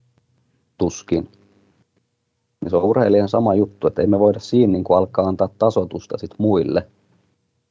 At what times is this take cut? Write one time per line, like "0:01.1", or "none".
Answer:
none